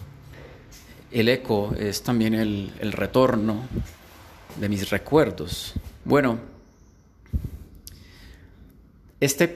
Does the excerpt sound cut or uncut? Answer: cut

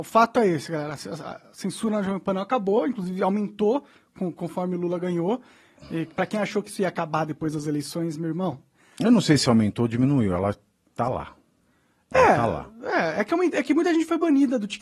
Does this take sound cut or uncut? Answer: uncut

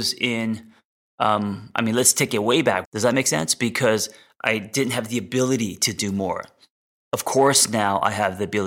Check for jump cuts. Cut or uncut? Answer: cut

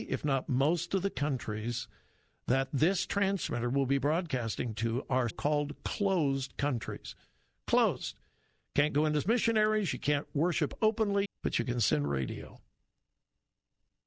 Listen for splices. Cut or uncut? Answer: cut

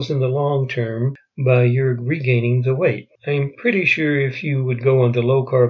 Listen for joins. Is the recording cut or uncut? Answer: cut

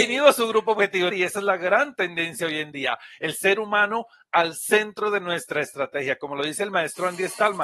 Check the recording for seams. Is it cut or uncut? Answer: cut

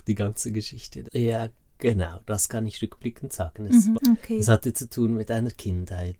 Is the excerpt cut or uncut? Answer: cut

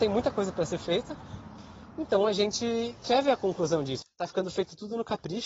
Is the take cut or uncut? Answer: cut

